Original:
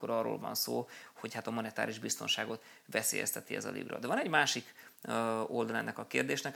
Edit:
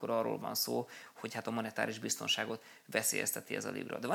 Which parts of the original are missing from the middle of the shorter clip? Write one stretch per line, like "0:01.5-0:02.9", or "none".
none